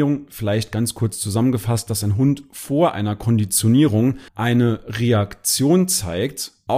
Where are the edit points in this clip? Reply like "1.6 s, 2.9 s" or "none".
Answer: 4.3 s